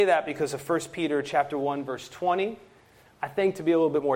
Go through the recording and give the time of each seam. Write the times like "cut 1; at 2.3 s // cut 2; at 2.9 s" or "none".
cut 1; at 3.1 s